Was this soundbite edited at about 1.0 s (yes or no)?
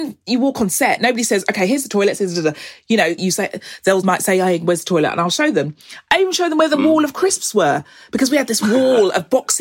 no